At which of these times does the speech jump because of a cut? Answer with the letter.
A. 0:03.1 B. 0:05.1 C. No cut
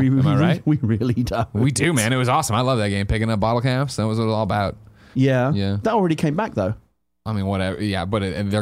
B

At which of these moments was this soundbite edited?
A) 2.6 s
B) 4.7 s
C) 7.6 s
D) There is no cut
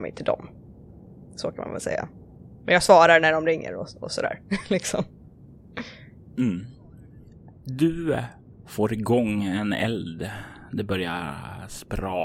D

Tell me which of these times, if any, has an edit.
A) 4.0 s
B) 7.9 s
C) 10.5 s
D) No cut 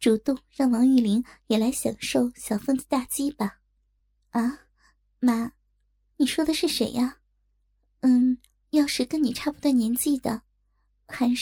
D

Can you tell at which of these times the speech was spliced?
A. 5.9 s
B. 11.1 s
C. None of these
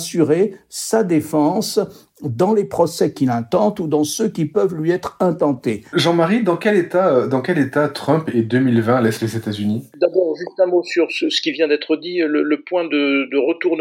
A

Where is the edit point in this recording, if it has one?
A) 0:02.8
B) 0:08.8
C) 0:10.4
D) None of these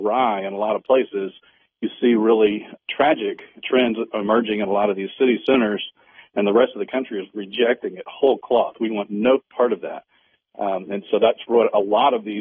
A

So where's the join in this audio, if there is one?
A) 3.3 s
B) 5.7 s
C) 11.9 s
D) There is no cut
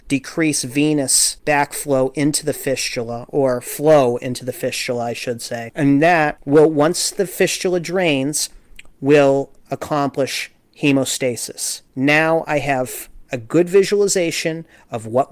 C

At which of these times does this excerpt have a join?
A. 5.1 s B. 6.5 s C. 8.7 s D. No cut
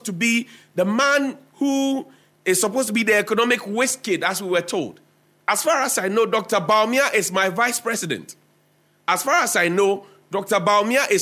B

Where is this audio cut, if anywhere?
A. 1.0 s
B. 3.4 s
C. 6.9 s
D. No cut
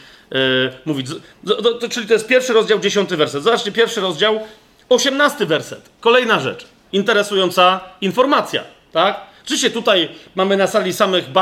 C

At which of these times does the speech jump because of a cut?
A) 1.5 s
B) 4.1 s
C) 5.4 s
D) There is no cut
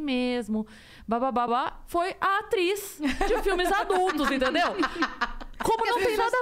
A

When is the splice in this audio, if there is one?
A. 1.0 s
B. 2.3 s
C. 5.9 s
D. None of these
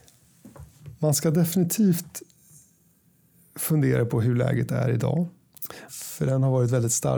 C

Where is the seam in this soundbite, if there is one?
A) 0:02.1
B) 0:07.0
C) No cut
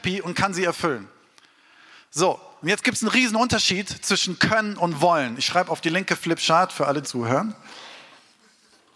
B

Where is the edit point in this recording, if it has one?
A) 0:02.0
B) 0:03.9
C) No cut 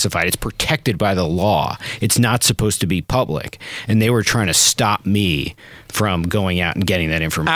C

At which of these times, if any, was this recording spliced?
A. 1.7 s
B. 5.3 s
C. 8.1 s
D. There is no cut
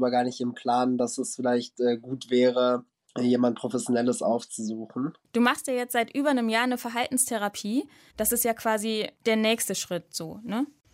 C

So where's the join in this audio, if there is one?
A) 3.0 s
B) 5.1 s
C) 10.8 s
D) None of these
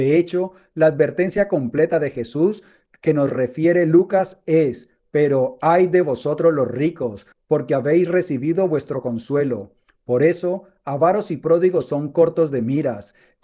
D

